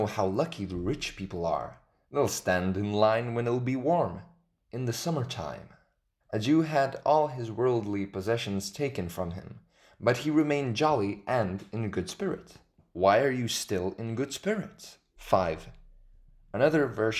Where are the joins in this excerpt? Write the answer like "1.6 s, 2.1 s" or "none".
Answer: 6.2 s, 12.8 s, 15.2 s